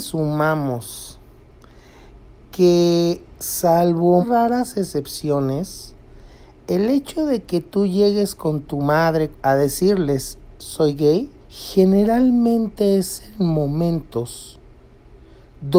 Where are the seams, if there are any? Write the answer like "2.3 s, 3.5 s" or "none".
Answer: 4.2 s, 9.3 s, 11.4 s